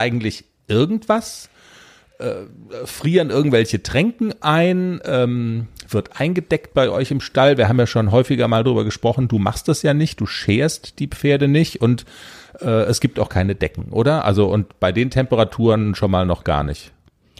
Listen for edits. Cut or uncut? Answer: uncut